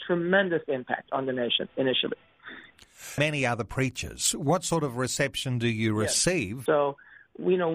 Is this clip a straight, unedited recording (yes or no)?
no